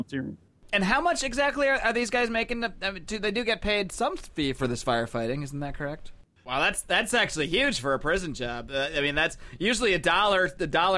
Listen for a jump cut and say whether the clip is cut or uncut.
cut